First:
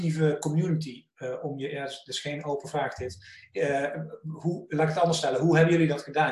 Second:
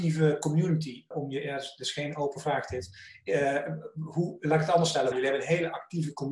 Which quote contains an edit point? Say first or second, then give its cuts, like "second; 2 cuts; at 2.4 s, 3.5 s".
second; 2 cuts; at 1.1 s, 5.1 s